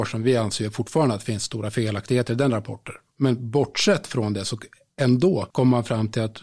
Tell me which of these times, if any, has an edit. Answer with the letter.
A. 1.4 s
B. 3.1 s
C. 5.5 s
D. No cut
C